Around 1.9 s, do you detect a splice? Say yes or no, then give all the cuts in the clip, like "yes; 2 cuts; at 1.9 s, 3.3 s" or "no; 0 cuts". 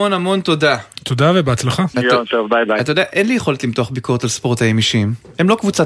yes; 1 cut; at 1.9 s